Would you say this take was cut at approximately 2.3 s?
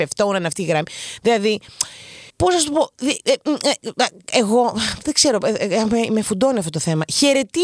yes; 1 cut; at 2.3 s

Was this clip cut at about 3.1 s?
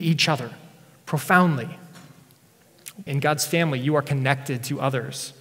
yes; 1 cut; at 3.1 s

